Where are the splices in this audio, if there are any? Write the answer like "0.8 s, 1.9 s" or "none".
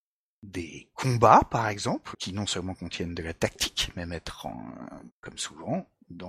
2.1 s, 5.1 s

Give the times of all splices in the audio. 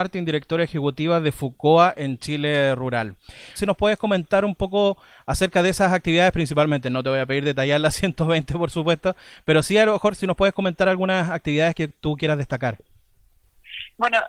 3.6 s

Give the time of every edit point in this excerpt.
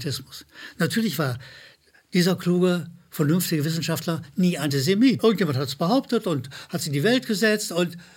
5.2 s

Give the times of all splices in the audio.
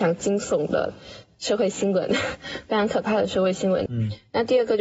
3.9 s

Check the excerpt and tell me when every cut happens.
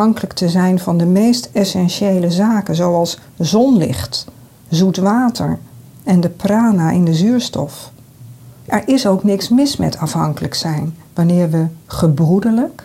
8.6 s, 11.0 s

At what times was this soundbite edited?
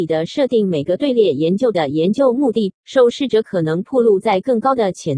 2.7 s

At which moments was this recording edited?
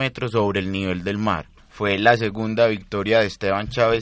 1.6 s

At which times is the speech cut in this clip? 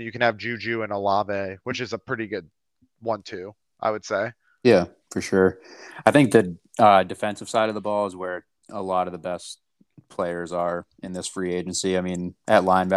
none

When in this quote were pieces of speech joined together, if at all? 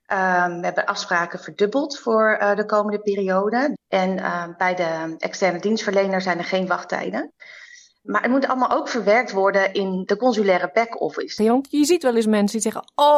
3.7 s, 11.4 s

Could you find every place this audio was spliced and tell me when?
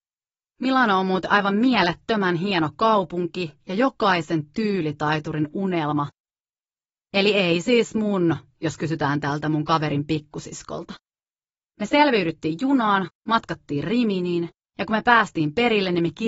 none

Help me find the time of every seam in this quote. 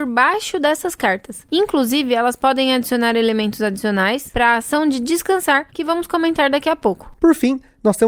none

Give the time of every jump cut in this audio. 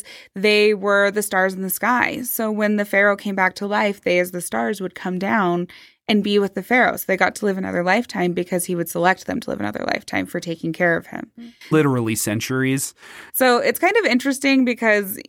11.7 s, 13.3 s

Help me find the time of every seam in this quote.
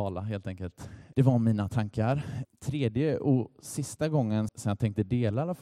1.1 s, 2.4 s, 4.5 s

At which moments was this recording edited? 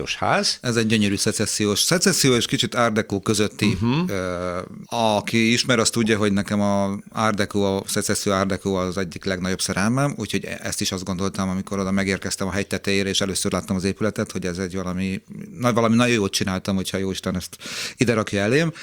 4.8 s

